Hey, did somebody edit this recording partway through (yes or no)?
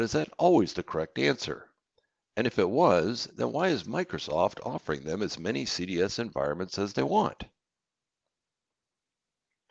no